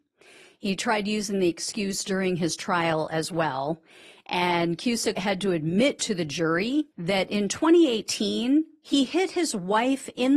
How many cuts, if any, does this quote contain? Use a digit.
2